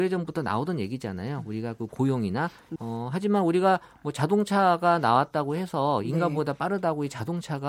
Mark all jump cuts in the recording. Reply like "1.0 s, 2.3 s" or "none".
2.8 s